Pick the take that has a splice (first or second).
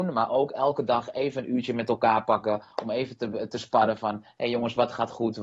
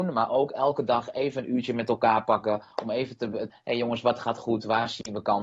second